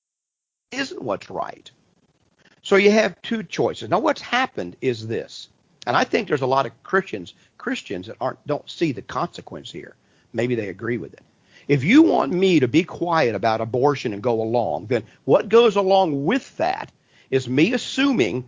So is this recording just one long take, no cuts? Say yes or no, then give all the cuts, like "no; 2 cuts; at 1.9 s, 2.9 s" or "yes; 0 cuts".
yes; 0 cuts